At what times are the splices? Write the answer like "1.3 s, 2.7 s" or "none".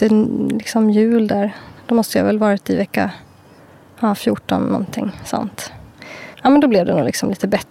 6.3 s